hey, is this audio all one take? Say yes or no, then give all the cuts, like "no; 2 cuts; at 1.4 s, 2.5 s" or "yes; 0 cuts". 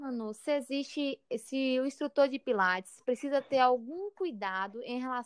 yes; 0 cuts